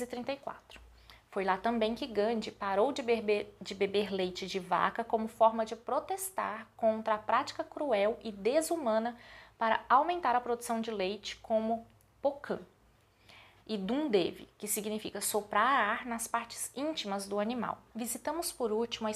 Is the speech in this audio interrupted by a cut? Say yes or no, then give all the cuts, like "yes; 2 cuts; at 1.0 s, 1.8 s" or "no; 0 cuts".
yes; 2 cuts; at 13.6 s, 17.9 s